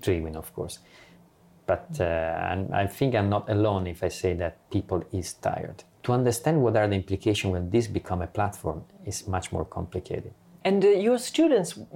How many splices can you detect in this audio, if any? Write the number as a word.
two